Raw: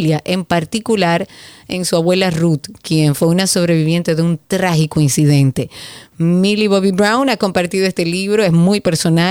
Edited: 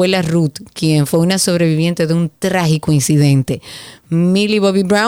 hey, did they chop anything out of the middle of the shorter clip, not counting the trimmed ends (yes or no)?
no